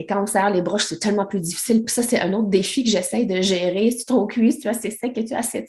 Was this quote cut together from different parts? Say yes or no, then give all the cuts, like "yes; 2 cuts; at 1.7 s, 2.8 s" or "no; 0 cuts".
no; 0 cuts